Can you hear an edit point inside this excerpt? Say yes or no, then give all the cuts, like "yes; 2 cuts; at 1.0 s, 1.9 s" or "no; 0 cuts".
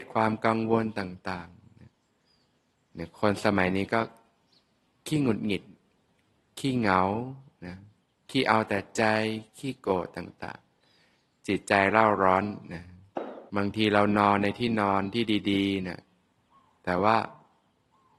yes; 1 cut; at 13.5 s